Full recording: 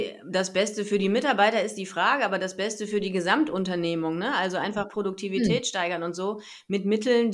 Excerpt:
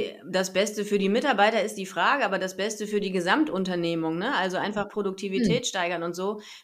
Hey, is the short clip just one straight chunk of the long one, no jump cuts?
yes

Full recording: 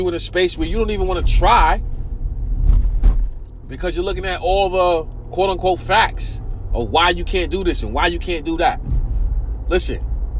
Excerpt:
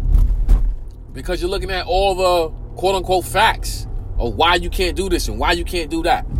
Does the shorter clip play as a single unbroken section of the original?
yes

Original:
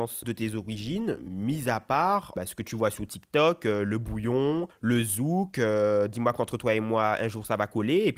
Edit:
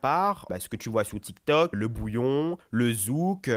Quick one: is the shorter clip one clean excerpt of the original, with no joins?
no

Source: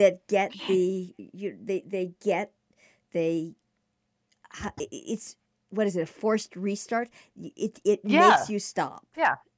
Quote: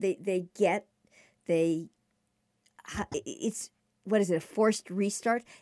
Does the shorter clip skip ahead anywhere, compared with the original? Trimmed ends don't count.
no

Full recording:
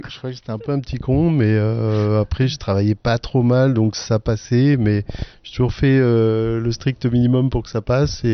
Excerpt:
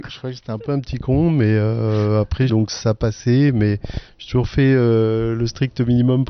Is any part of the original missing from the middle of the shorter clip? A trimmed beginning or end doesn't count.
yes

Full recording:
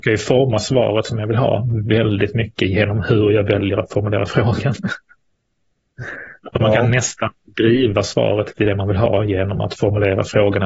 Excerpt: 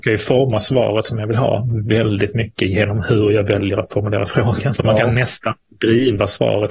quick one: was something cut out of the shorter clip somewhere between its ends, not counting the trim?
yes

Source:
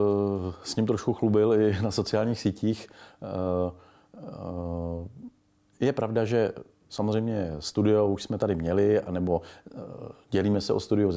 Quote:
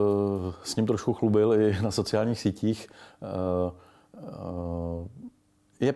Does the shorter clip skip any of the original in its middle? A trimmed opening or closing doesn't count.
no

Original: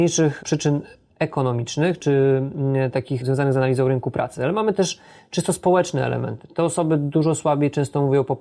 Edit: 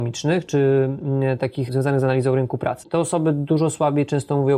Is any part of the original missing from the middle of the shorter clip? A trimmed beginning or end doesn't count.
yes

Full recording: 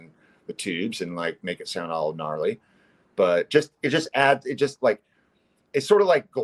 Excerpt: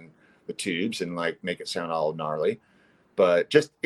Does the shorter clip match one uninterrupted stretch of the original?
yes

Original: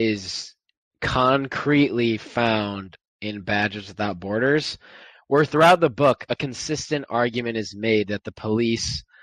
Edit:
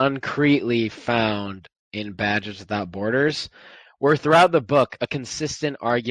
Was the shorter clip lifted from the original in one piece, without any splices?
yes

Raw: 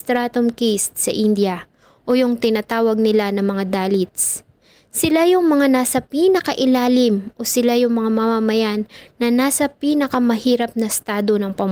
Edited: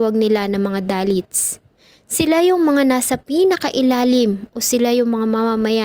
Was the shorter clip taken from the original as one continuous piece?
yes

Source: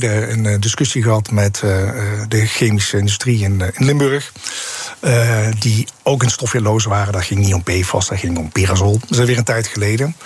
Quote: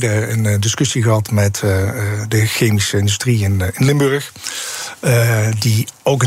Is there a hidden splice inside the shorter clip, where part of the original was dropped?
no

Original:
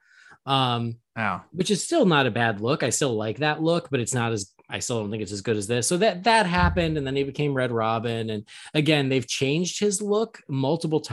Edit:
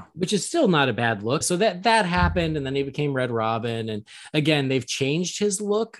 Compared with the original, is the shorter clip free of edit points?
no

